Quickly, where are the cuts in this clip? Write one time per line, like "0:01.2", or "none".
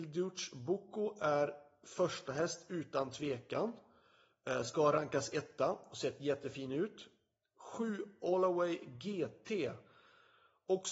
none